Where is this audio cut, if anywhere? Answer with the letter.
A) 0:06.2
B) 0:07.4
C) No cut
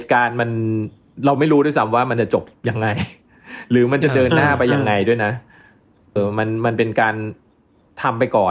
A